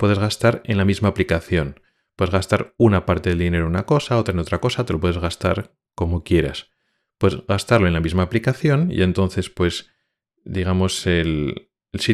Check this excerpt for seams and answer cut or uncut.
uncut